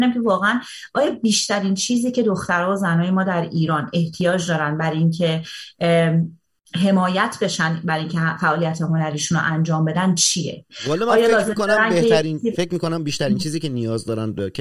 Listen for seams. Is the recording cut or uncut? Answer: uncut